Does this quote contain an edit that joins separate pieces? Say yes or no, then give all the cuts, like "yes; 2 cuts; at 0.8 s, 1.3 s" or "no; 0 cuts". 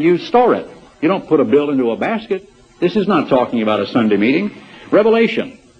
yes; 1 cut; at 0.9 s